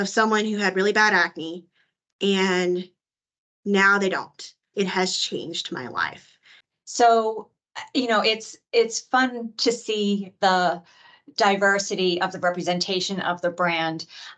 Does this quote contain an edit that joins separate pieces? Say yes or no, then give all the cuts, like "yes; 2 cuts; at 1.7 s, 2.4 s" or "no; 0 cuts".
yes; 2 cuts; at 4.7 s, 6.7 s